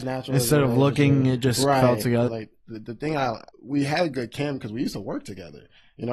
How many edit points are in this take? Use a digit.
2